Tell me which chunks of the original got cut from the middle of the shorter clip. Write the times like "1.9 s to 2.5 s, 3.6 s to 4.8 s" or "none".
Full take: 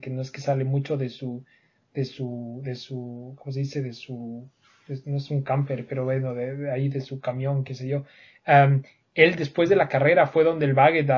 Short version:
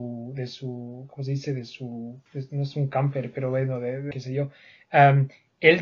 4.5 s to 4.8 s, 6.7 s to 7.7 s